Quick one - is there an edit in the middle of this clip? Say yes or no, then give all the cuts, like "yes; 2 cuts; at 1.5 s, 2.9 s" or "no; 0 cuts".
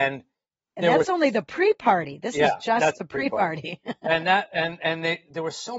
no; 0 cuts